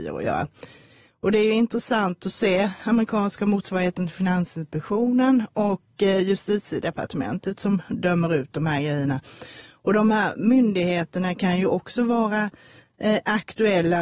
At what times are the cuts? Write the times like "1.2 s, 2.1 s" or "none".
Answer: 2.8 s